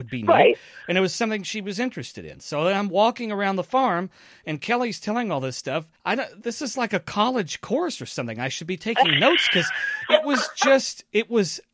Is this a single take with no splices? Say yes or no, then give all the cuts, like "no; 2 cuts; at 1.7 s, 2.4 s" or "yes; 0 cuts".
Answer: yes; 0 cuts